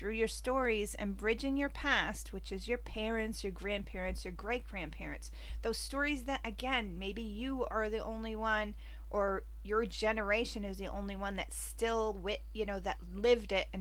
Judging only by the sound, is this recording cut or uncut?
uncut